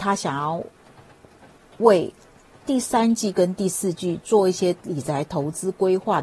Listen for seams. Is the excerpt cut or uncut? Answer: uncut